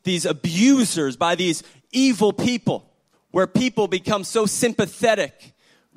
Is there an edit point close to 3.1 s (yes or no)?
yes